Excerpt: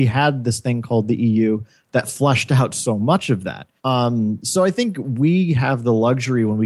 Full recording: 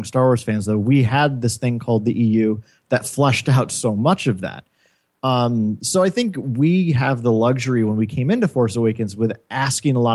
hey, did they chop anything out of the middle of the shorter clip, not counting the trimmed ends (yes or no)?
yes